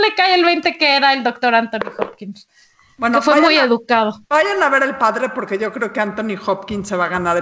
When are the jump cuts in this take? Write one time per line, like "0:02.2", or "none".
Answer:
none